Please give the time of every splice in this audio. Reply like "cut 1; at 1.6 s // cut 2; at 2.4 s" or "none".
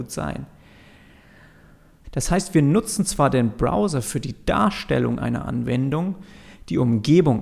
cut 1; at 2.0 s